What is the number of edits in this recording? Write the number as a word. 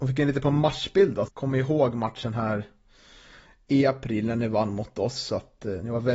one